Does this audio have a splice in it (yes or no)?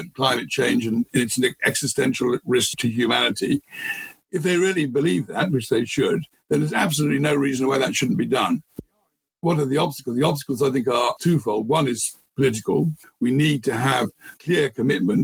no